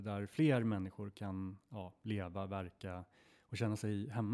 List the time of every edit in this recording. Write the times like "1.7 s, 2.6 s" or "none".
none

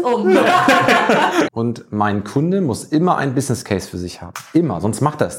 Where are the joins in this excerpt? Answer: 1.4 s

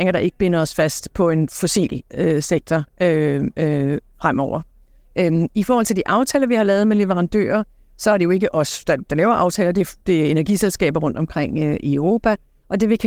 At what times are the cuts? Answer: none

